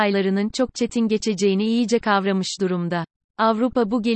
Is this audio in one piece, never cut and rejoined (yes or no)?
no